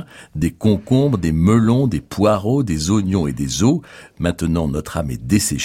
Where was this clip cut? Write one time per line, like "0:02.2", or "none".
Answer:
none